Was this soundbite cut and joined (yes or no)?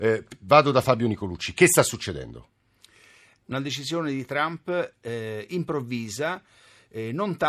no